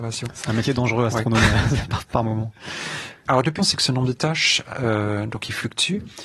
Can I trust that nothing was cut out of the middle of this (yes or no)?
no